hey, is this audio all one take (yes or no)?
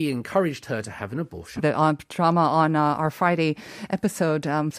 no